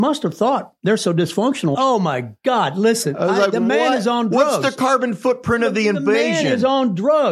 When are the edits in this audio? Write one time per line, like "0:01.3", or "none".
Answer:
0:01.7